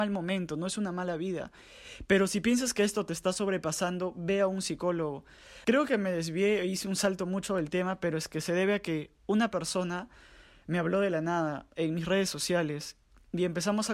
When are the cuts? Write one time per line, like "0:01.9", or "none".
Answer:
0:05.6